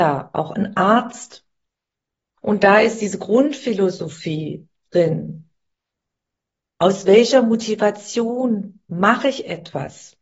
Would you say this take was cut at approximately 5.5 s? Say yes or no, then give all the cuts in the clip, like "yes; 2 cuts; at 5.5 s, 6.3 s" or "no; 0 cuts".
no; 1 cut; at 2.4 s